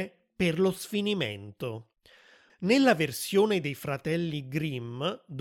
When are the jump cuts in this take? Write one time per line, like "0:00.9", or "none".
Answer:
0:02.5